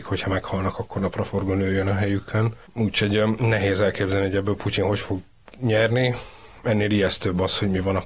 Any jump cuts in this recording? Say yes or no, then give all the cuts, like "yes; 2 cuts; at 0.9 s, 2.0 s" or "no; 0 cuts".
yes; 1 cut; at 2.7 s